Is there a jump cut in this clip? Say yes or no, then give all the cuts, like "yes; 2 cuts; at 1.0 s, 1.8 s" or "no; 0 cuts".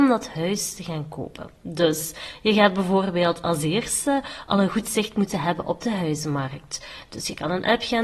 no; 0 cuts